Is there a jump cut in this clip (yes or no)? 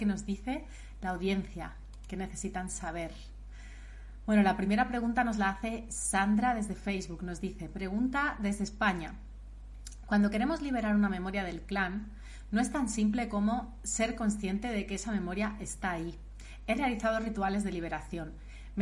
no